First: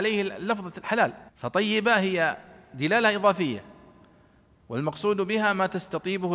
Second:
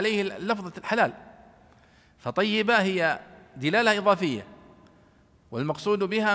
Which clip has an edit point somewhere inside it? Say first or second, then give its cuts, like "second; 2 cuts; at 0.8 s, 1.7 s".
first; 1 cut; at 1.3 s